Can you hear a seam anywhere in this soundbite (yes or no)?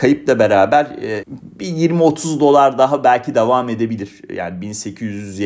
yes